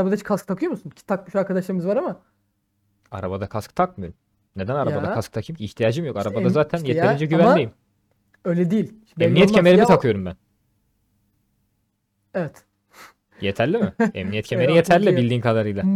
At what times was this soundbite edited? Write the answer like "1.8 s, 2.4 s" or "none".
none